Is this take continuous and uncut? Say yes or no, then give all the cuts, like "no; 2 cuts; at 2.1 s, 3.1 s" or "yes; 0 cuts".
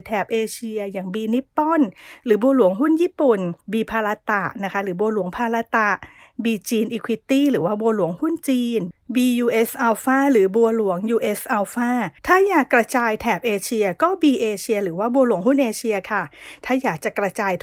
no; 2 cuts; at 3.6 s, 12.2 s